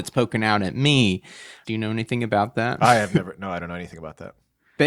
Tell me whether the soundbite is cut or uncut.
cut